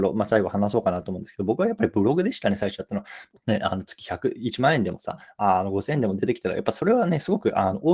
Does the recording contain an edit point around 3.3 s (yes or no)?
yes